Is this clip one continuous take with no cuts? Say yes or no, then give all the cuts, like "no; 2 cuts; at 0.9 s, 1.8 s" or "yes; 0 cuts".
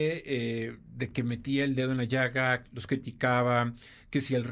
yes; 0 cuts